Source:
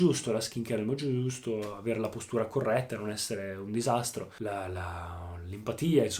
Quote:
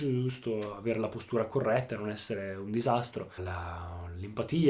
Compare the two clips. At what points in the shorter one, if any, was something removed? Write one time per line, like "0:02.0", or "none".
0:03.4

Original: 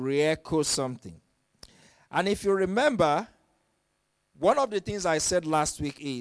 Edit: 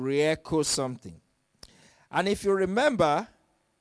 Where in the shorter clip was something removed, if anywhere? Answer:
none

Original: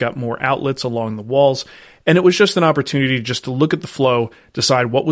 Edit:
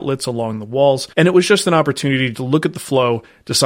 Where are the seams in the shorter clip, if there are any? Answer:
0:01.1
0:02.3

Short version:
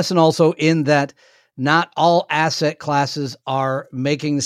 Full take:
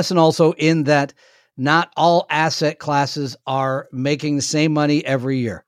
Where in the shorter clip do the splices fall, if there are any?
none

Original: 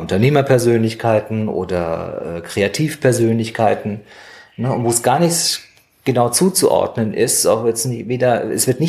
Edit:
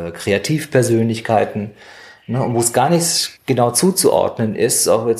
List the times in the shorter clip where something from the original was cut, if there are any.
0:03.4

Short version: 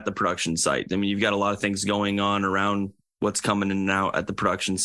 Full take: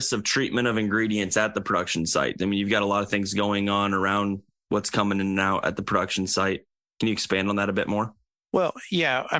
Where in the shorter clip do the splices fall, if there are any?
none

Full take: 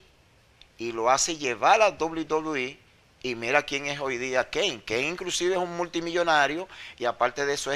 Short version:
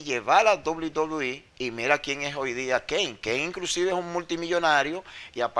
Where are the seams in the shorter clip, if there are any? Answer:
0:01.5

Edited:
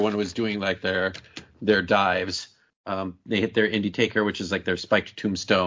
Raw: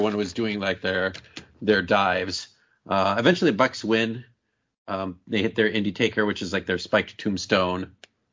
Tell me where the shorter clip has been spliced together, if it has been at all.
0:02.7

